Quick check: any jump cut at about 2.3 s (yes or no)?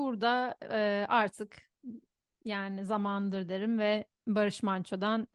no